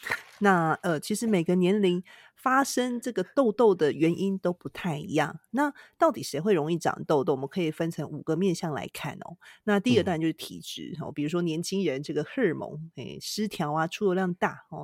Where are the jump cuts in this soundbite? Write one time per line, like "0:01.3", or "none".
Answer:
none